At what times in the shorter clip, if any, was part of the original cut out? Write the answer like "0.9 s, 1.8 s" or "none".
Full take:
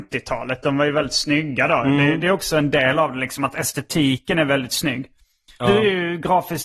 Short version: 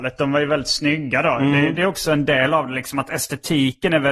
none